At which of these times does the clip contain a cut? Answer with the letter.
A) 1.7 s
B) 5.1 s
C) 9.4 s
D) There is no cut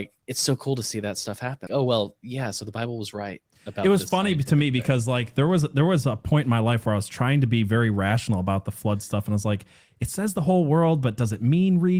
A